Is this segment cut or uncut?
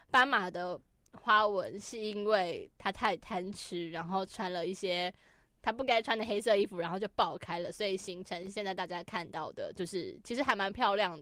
uncut